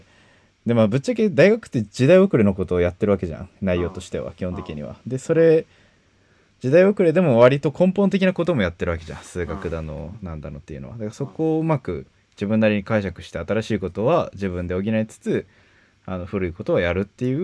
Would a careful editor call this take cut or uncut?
uncut